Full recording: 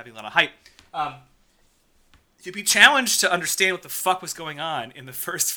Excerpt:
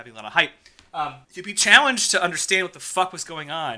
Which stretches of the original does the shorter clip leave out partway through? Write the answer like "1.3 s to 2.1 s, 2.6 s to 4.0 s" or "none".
1.2 s to 2.3 s